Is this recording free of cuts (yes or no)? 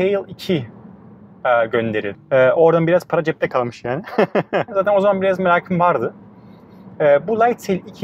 no